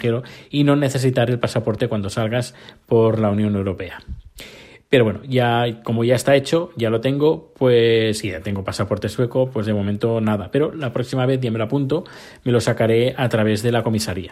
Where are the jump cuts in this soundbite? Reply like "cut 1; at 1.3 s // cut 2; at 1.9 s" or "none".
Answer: none